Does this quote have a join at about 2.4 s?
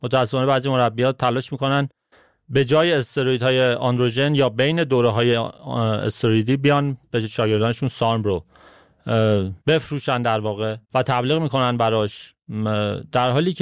no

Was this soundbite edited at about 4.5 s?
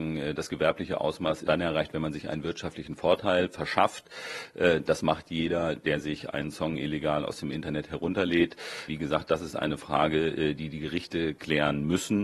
no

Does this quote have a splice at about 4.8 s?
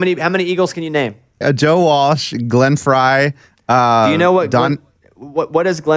no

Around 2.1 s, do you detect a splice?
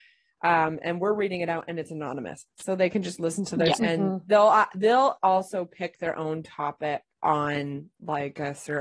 no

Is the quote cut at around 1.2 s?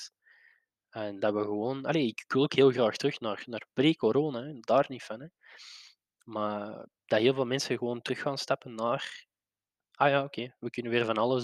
yes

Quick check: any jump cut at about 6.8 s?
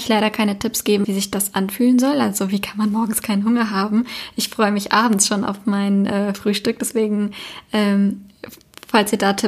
no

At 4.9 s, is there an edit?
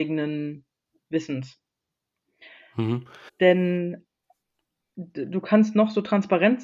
no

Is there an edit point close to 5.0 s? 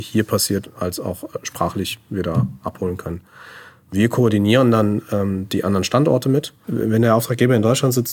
no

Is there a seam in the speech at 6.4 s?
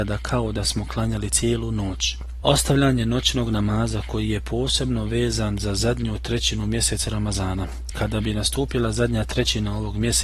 no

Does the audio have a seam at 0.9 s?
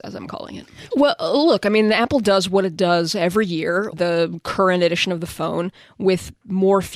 yes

